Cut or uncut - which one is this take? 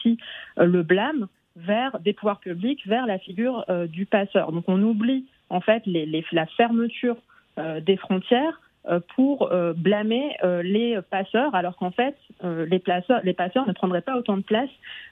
uncut